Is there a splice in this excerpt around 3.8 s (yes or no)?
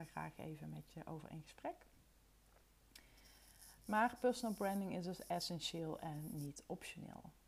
no